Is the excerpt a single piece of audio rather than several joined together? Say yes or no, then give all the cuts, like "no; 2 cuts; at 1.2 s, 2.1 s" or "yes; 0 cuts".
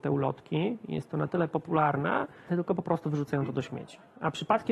no; 1 cut; at 2.5 s